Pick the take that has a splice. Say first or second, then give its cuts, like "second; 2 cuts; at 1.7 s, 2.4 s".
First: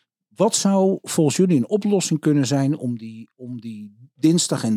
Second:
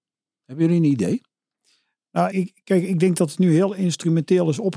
second; 1 cut; at 2.3 s